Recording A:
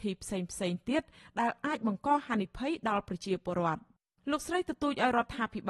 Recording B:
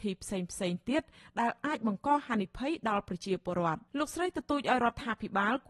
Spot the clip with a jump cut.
B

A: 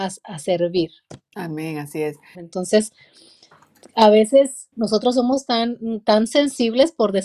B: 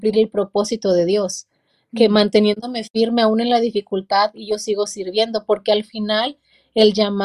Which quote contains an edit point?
A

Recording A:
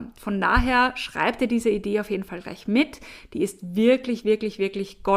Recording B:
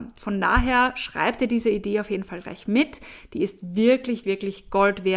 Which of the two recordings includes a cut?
B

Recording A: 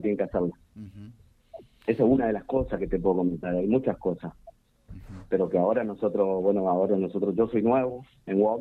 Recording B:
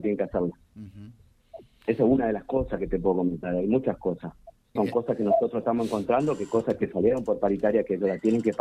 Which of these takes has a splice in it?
B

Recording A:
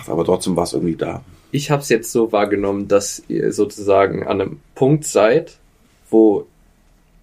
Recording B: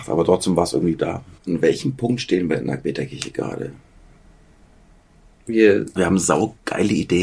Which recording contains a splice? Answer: B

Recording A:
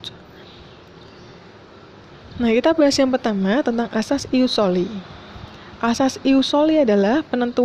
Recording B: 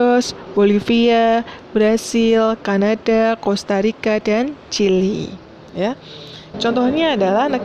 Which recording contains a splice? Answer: B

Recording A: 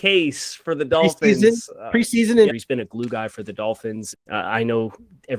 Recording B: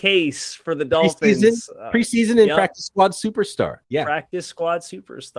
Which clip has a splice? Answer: A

